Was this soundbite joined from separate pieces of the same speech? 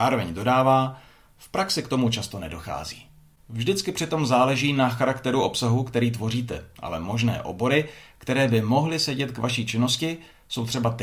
yes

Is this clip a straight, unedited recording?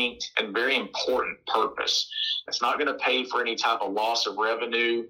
no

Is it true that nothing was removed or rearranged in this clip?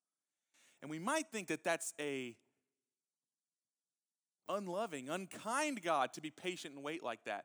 yes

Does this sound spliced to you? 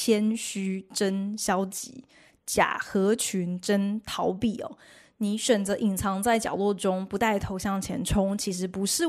no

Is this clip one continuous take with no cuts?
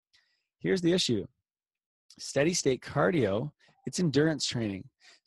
yes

